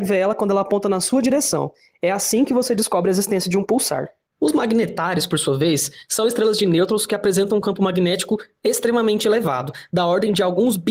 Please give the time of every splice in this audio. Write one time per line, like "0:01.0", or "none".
none